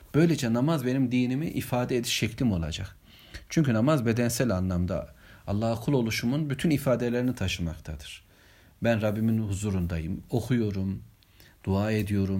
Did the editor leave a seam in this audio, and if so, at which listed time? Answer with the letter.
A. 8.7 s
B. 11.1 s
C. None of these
C